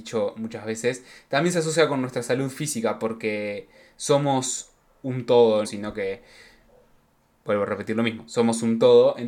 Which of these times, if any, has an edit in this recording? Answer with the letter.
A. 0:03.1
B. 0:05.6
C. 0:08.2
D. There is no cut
B